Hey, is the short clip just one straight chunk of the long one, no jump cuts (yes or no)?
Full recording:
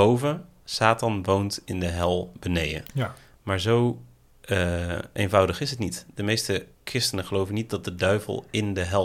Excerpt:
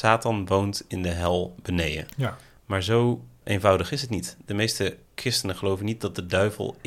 no